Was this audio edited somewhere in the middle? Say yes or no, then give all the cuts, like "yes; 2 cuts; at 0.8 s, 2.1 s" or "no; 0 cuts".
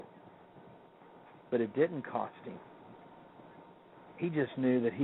no; 0 cuts